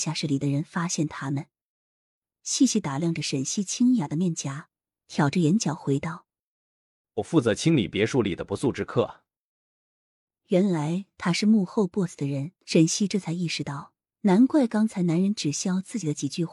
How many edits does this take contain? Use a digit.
2